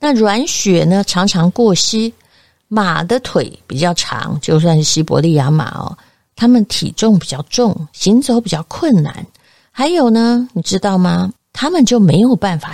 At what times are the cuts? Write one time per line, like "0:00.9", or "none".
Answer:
0:11.4